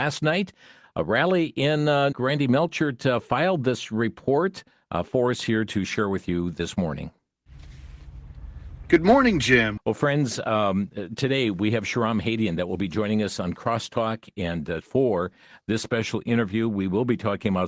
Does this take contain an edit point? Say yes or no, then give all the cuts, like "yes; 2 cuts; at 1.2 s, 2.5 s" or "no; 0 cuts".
yes; 3 cuts; at 2.1 s, 9.8 s, 14.8 s